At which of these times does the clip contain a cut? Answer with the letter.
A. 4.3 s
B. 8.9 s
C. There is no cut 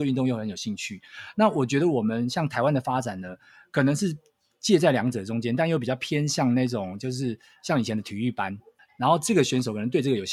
B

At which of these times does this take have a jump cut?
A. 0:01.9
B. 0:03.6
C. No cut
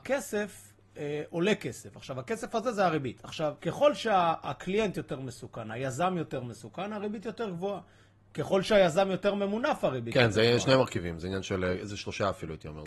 B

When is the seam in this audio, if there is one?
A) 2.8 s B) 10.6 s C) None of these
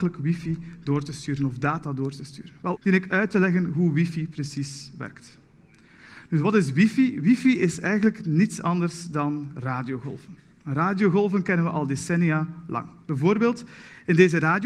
A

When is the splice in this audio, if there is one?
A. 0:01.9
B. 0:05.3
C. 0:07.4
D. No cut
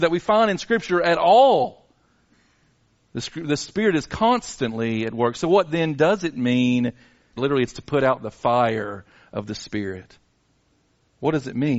C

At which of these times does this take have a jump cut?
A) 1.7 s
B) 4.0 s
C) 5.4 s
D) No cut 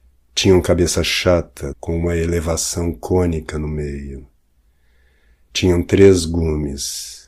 A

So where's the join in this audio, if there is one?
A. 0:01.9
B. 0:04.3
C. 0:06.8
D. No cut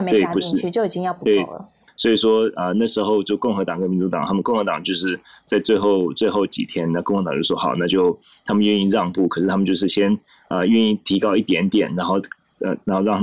A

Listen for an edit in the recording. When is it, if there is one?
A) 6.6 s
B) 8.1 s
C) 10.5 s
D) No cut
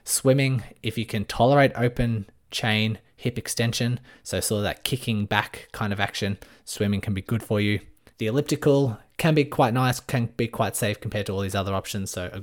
B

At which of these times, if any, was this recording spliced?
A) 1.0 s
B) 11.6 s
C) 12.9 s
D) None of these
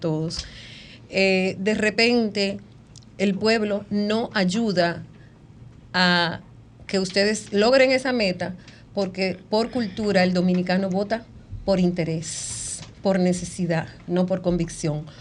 D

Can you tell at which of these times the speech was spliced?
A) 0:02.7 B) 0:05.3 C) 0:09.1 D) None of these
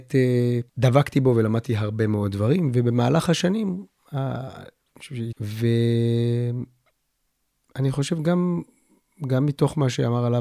B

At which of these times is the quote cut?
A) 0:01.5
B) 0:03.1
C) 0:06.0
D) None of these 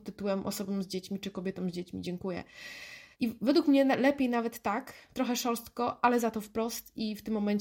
B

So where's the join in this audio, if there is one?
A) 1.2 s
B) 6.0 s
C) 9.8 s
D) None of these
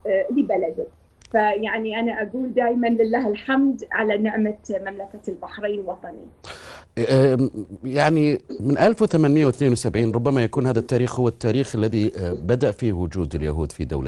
D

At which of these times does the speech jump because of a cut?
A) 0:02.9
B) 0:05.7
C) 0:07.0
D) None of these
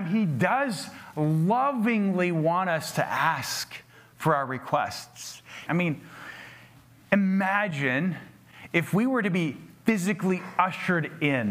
B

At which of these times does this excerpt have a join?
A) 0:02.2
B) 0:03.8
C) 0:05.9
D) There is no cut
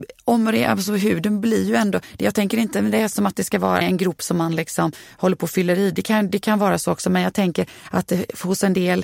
B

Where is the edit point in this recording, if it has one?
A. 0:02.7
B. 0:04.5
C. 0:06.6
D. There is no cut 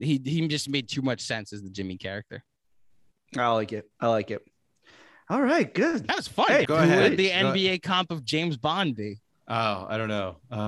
C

